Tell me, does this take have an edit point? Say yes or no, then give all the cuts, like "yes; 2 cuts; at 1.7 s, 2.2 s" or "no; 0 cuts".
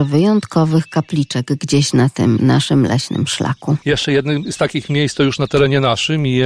yes; 1 cut; at 3.8 s